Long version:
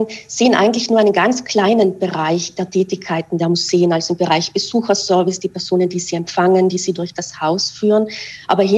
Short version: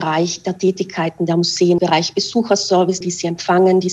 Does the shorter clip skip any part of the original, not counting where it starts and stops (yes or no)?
yes